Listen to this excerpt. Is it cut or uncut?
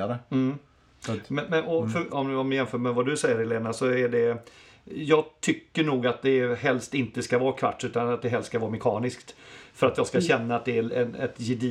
cut